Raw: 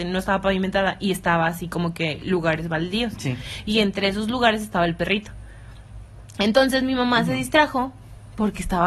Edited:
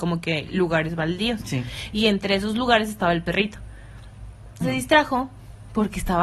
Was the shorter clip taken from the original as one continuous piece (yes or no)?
no